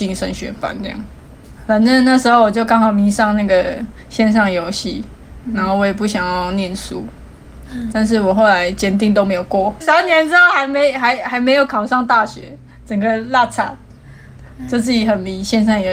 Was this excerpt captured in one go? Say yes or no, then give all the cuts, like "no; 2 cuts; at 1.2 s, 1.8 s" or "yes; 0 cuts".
no; 2 cuts; at 7.9 s, 9.8 s